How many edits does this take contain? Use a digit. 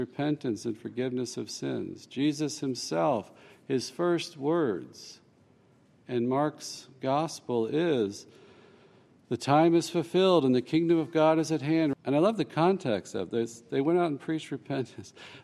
1